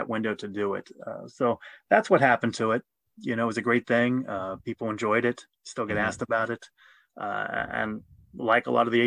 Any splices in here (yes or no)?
no